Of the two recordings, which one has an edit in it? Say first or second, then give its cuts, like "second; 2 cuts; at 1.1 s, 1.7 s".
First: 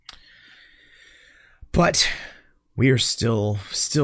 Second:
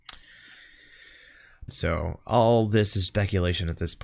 second; 2 cuts; at 1.7 s, 3.1 s